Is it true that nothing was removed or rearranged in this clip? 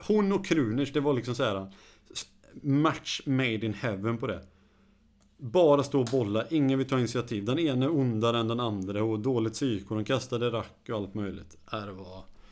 yes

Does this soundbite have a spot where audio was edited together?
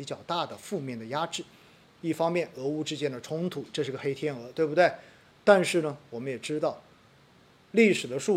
yes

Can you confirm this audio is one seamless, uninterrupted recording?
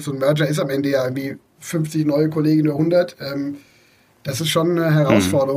yes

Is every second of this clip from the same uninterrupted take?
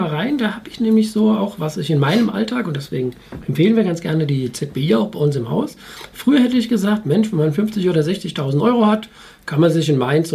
yes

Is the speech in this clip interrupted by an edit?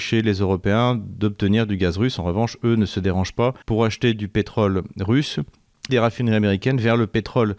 yes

